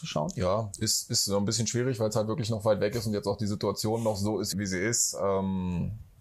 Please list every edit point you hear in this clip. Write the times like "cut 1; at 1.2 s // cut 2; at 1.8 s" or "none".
cut 1; at 4.5 s